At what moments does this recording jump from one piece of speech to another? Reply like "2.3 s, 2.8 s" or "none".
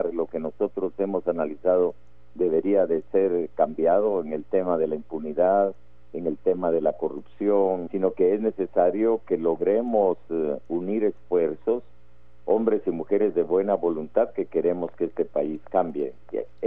7.9 s